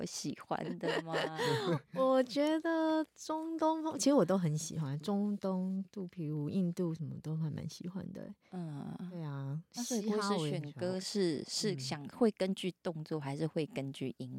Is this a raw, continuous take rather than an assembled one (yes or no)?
yes